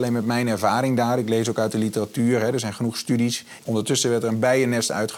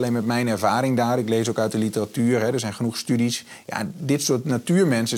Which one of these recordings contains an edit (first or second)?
first